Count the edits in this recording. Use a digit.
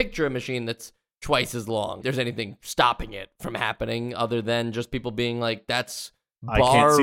1